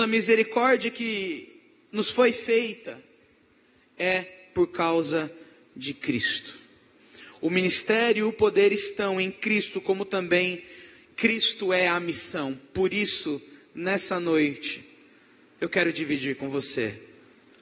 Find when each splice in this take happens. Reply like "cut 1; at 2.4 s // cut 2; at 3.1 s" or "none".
none